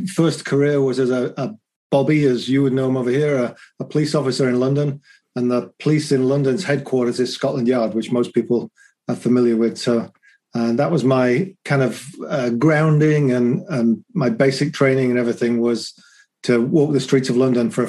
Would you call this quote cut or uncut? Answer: uncut